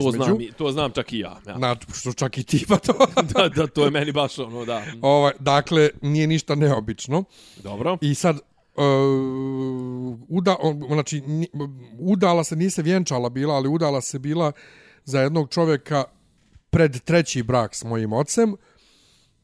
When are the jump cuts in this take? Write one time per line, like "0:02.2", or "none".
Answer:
none